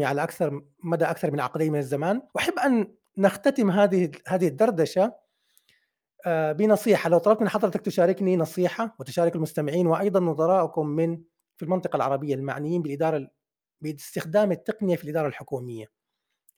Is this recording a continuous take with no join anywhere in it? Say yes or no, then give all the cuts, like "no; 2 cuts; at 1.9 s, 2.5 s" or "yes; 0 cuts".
no; 1 cut; at 2.3 s